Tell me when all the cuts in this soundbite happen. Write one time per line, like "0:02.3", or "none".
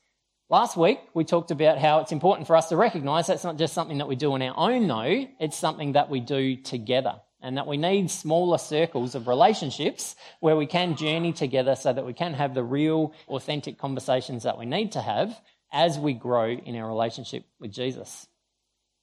0:13.3